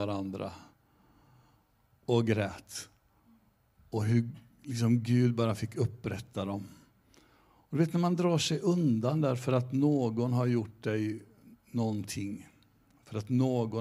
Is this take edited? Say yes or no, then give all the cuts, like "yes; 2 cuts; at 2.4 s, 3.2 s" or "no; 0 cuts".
no; 0 cuts